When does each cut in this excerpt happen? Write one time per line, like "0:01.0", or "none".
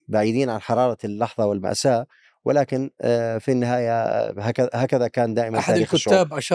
none